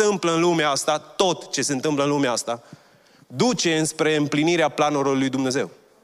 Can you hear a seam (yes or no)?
no